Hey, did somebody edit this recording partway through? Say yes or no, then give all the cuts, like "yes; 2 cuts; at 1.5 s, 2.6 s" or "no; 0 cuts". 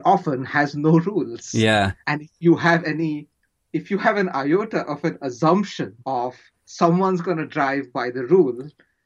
yes; 2 cuts; at 2.0 s, 6.0 s